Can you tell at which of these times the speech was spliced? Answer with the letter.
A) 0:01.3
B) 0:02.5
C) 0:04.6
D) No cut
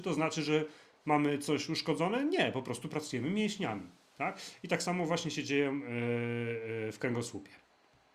D